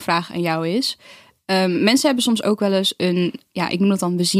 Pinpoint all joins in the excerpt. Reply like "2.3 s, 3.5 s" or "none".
none